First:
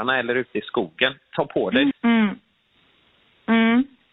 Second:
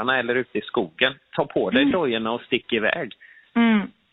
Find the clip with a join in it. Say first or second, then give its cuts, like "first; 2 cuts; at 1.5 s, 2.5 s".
first; 1 cut; at 1.9 s